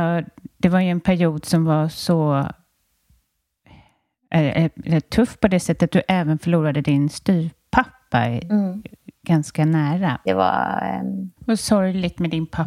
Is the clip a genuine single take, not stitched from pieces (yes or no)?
no